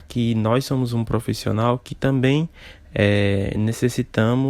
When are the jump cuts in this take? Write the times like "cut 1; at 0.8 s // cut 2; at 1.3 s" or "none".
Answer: none